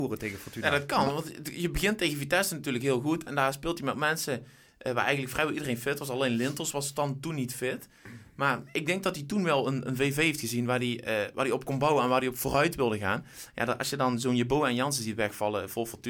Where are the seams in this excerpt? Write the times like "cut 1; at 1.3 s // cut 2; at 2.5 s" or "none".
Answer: none